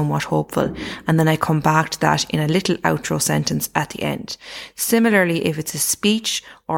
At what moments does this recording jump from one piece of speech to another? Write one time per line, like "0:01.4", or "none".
none